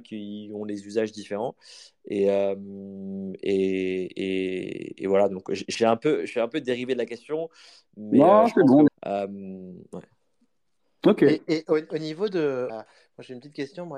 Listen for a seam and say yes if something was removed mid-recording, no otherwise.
yes